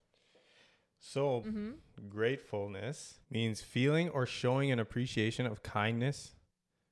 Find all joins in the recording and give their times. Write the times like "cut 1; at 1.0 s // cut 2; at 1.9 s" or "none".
cut 1; at 1.4 s // cut 2; at 3.2 s